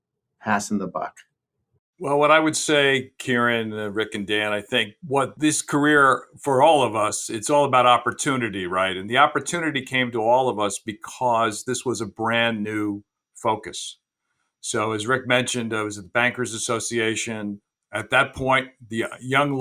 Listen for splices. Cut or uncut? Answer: uncut